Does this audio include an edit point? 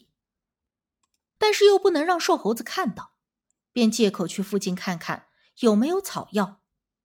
yes; 1 cut; at 1.4 s

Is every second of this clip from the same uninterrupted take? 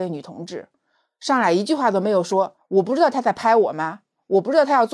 no; 1 cut; at 2.6 s

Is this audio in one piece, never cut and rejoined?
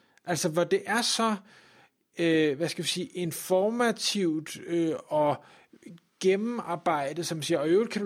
yes; 0 cuts

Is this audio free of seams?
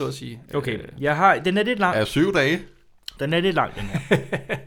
yes; 0 cuts

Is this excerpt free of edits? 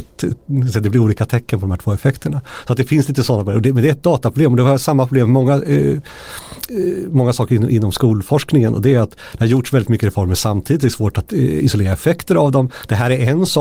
yes; 0 cuts

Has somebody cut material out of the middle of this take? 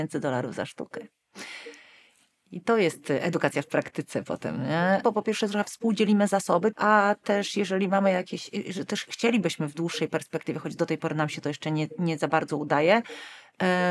yes; 2 cuts; at 5.0 s, 6.7 s

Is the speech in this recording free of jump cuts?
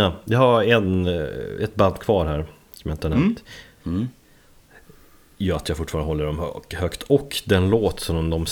no; 1 cut; at 3.8 s

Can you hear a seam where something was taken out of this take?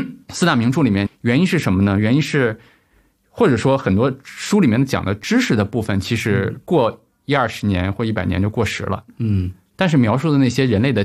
yes; 1 cut; at 1.1 s

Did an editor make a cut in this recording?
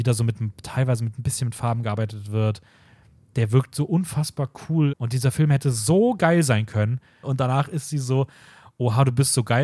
yes; 2 cuts; at 4.9 s, 7.2 s

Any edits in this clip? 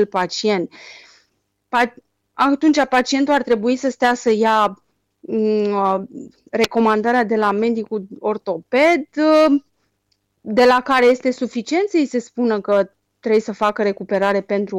no; 0 cuts

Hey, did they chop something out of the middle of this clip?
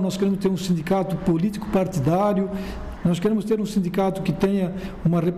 yes; 1 cut; at 3.0 s

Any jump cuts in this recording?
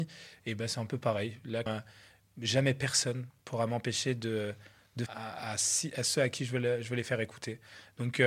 yes; 2 cuts; at 1.7 s, 5.1 s

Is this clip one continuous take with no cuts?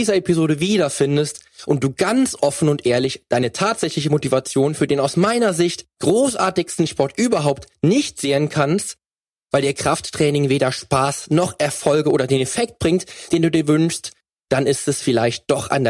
yes; 0 cuts

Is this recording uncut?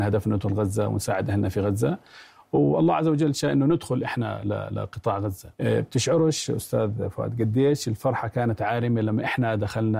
no; 1 cut; at 5.5 s

